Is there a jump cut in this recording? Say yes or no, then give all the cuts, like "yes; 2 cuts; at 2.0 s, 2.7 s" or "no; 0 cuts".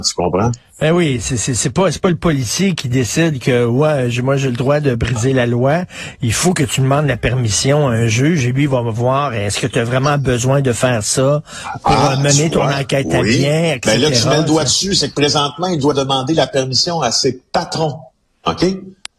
no; 0 cuts